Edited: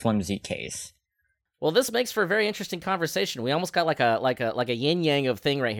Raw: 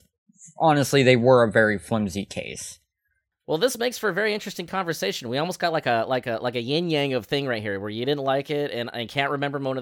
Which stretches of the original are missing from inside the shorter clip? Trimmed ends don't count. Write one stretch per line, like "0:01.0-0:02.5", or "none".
none